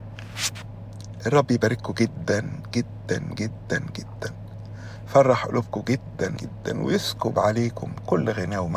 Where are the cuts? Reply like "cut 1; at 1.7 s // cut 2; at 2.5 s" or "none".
cut 1; at 6.4 s